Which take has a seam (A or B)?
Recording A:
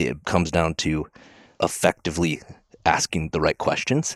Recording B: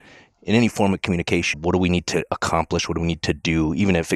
B